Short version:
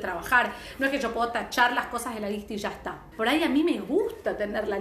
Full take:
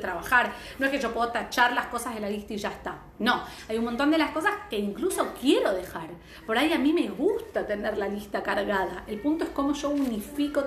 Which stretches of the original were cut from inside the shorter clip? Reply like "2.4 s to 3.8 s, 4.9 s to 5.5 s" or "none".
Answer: 3.1 s to 6.4 s